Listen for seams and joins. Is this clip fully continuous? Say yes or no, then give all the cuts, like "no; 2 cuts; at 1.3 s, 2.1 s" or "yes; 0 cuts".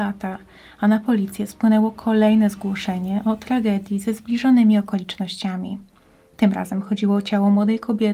yes; 0 cuts